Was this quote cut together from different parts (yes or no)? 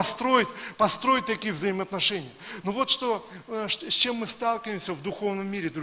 no